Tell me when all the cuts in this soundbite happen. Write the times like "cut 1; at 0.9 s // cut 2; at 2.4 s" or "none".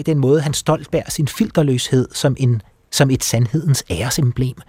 none